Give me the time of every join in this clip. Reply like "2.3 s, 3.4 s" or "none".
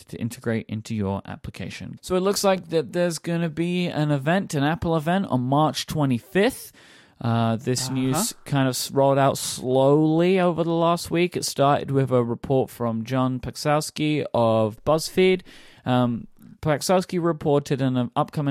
2.0 s